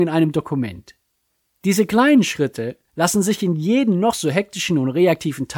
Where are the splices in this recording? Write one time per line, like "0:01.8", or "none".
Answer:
none